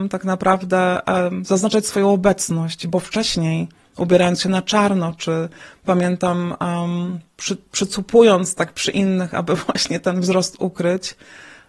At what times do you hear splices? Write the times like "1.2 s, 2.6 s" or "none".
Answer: none

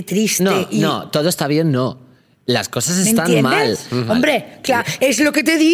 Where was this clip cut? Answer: 4.1 s

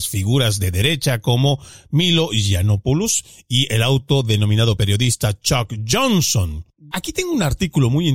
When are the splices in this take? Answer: 6.9 s

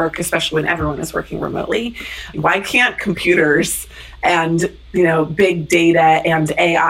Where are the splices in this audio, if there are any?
2.3 s

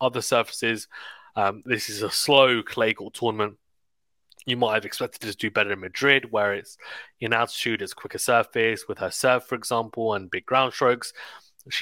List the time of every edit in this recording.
none

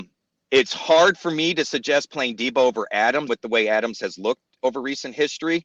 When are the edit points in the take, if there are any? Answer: 3.3 s

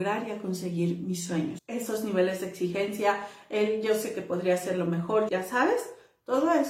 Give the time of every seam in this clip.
1.6 s, 5.3 s

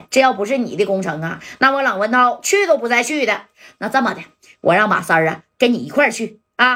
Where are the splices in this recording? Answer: none

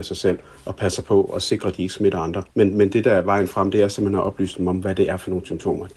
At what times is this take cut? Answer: 2.5 s

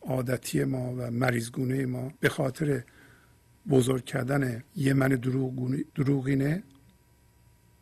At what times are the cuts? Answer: 2.2 s, 4.7 s, 5.9 s

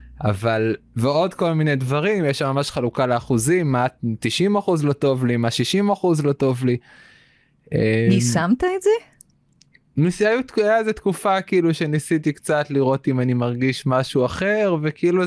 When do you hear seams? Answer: none

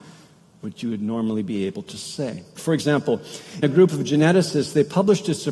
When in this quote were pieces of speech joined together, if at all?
2.6 s, 3.6 s

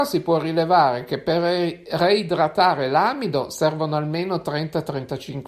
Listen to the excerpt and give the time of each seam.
none

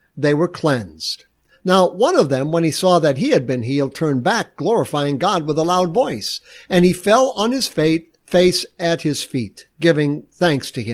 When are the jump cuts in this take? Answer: none

